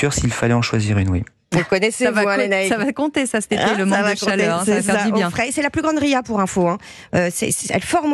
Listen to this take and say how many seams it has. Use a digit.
0